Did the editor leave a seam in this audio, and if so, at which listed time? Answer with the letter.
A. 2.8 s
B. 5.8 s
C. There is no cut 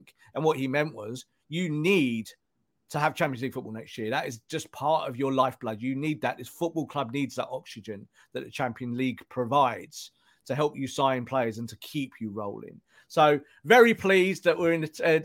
C